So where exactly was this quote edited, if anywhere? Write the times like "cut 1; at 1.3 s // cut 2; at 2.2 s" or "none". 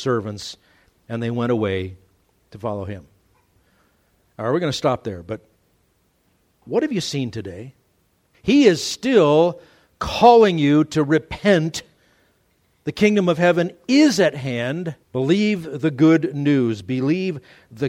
cut 1; at 8.3 s // cut 2; at 15.0 s